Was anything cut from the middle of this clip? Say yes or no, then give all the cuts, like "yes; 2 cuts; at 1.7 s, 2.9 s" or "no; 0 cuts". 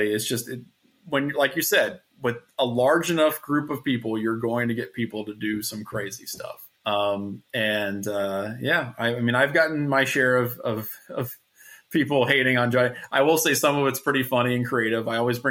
yes; 1 cut; at 6.7 s